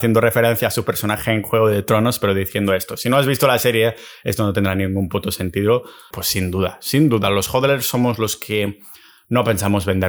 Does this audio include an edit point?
yes; 1 cut; at 6.1 s

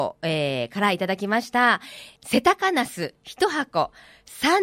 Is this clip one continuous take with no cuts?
no; 1 cut; at 2.2 s

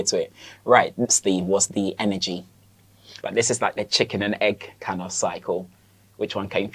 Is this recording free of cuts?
no; 2 cuts; at 1.1 s, 3.2 s

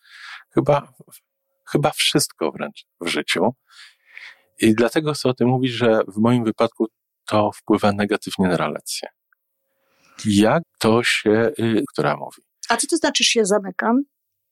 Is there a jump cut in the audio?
yes; 2 cuts; at 10.6 s, 11.9 s

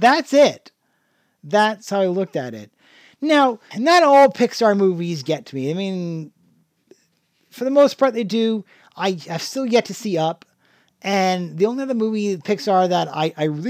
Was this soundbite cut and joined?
yes; 1 cut; at 3.7 s

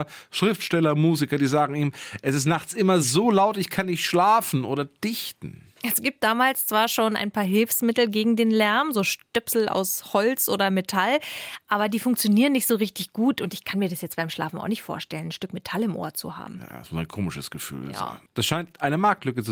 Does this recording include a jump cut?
no; 0 cuts

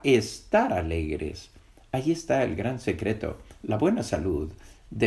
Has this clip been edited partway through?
no; 0 cuts

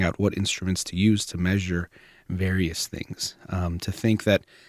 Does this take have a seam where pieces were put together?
no; 0 cuts

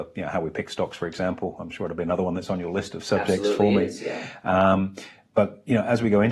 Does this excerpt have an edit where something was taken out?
no; 0 cuts

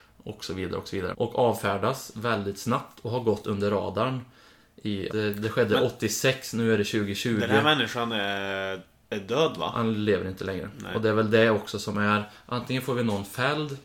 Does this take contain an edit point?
yes; 2 cuts; at 1.1 s, 5.1 s

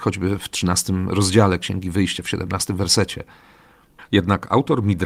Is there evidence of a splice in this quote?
yes; 1 cut; at 4.0 s

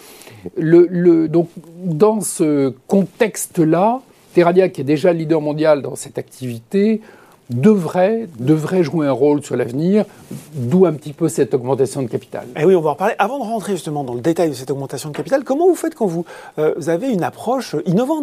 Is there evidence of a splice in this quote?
no; 0 cuts

